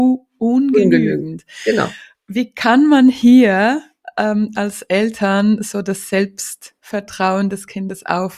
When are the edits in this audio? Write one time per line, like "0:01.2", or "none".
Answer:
0:06.8

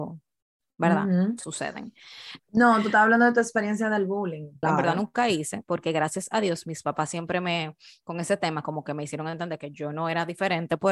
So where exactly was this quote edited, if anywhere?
0:02.4
0:04.6

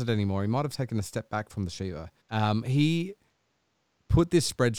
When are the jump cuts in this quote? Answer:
0:02.2

